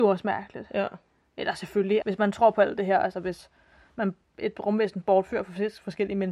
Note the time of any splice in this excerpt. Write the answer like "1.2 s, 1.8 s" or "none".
2.0 s